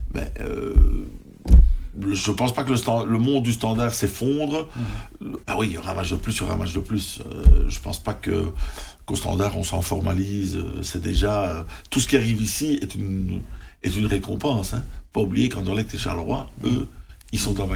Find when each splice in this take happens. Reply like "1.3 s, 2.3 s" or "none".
5.4 s

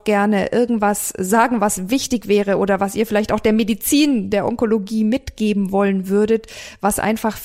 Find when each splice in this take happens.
none

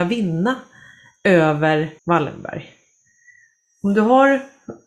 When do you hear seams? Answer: 2.0 s

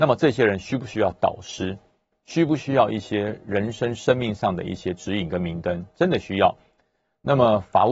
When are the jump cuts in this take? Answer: none

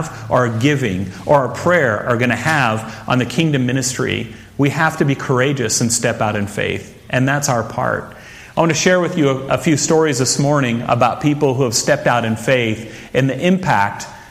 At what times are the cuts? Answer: none

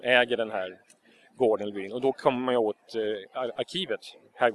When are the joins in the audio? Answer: none

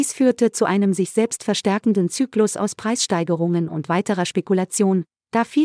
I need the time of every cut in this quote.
none

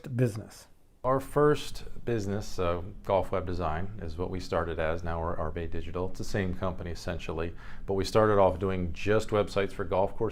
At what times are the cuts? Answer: none

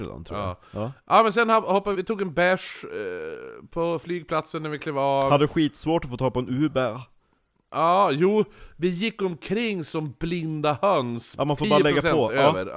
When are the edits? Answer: 1.9 s, 11.4 s

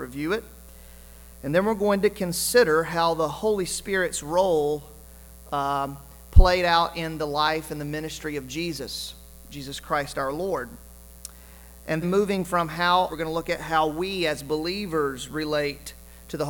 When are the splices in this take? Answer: 12.0 s, 13.1 s

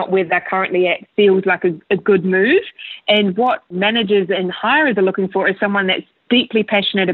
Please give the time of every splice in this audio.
none

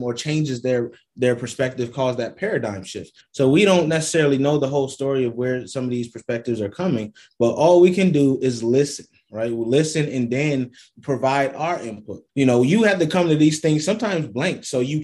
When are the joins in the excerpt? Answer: 3.2 s, 12.3 s

